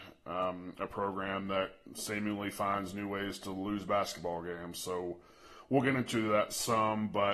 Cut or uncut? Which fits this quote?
uncut